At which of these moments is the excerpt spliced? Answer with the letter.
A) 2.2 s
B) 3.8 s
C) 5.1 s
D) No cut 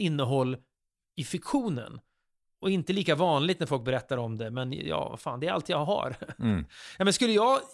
D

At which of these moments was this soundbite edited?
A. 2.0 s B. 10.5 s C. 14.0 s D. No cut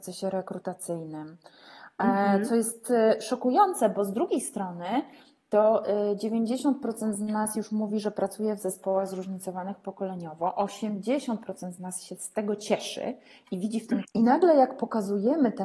C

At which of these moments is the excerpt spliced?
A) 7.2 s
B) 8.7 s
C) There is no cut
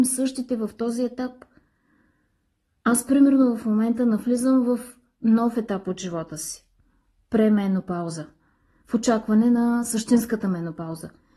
C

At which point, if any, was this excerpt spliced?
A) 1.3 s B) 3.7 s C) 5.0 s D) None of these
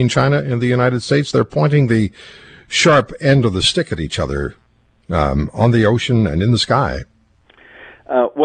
D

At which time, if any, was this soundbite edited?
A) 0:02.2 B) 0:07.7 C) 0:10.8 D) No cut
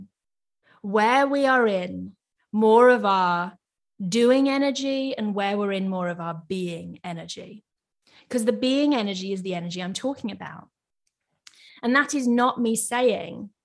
D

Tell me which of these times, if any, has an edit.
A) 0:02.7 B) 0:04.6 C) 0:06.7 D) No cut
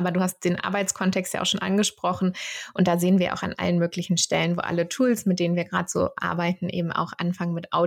D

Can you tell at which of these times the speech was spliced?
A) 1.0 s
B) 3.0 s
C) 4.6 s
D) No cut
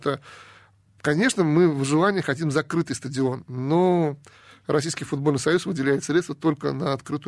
D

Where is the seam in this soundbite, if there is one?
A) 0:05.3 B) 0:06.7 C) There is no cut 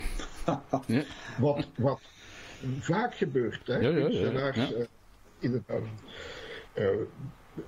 B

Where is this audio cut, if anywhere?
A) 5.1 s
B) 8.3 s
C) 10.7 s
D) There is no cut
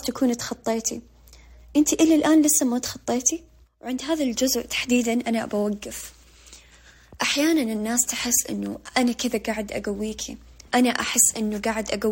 C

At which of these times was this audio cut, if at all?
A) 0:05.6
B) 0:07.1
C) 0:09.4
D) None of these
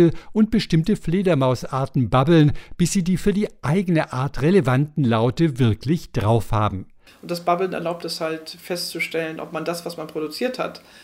B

